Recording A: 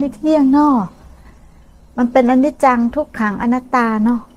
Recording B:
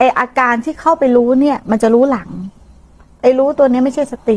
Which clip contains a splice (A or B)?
A